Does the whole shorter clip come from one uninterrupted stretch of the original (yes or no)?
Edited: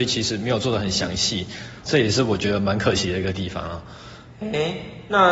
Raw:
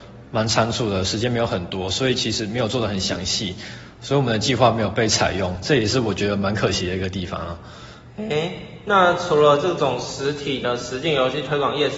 no